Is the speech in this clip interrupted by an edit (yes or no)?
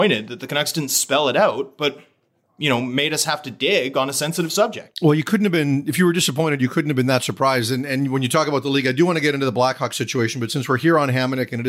no